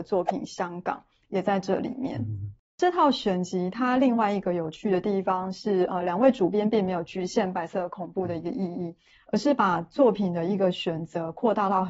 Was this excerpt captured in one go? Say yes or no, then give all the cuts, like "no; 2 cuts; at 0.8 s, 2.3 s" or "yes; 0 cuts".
yes; 0 cuts